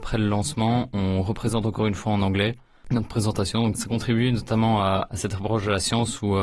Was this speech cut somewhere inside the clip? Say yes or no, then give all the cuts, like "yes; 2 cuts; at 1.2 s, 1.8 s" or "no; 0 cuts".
yes; 1 cut; at 3.7 s